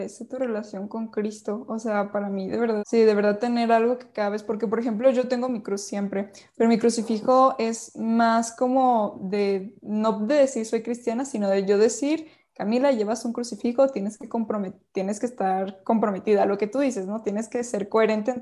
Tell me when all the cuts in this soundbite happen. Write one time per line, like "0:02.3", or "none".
0:02.8

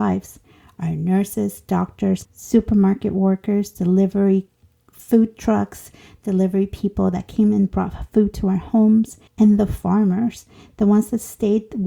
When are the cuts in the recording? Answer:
0:02.2
0:09.3

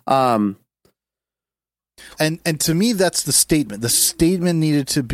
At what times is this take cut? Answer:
0:02.1

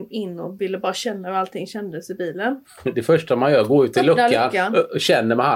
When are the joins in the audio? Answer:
none

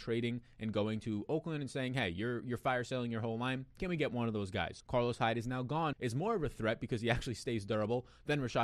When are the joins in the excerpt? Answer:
0:04.8
0:05.9

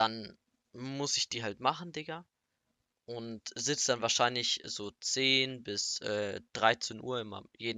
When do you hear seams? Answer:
none

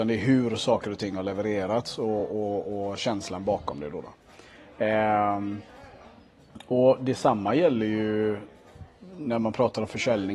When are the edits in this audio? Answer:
none

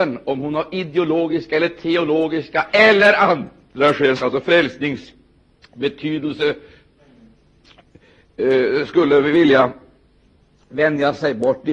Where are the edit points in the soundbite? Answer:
0:04.2

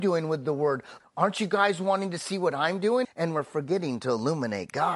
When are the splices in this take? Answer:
0:01.0
0:03.0

